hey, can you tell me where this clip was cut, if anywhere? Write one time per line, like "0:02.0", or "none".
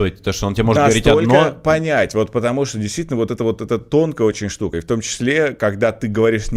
none